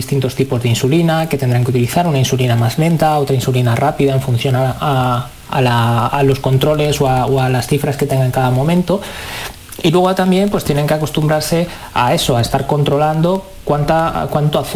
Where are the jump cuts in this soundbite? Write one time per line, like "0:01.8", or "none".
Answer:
none